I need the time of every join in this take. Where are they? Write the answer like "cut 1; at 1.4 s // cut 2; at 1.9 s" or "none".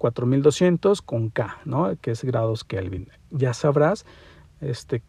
none